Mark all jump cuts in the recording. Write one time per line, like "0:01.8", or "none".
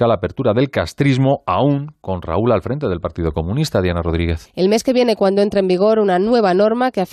0:04.5

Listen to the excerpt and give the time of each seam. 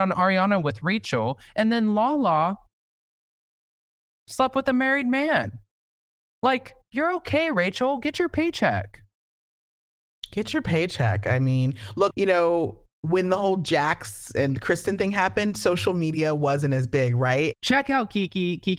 0:12.1
0:17.5

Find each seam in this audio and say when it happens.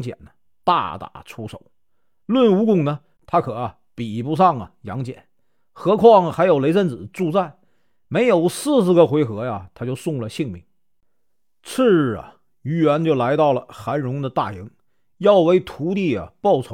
none

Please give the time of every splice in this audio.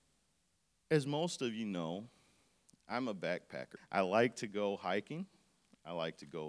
0:03.8

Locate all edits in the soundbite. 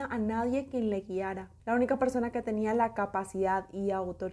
0:01.6

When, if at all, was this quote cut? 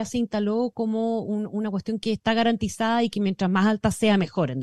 none

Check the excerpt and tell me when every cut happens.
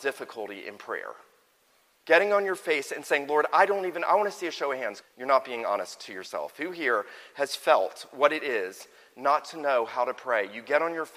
0:05.0

